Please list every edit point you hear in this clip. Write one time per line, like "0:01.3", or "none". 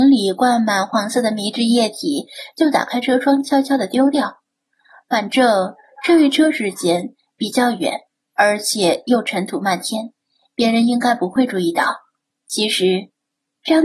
0:12.3

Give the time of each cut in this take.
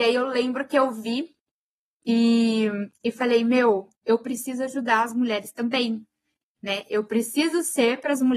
none

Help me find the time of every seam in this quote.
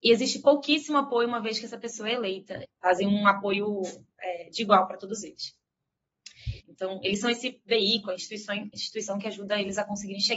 0:02.6
0:06.6

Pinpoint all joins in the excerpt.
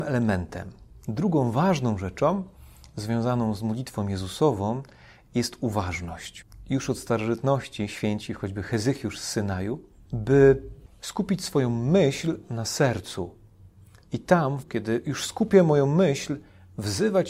0:10.0
0:14.6

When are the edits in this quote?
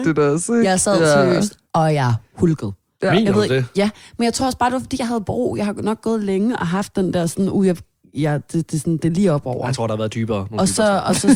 none

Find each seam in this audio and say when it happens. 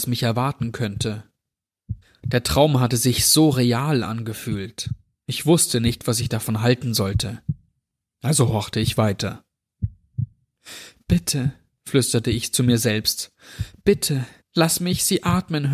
none

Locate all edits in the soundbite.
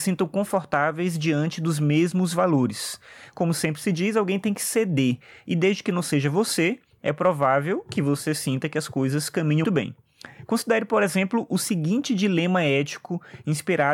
0:09.6

